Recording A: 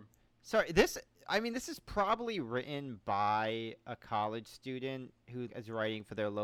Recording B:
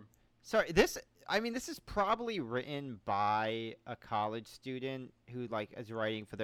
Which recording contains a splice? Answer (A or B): A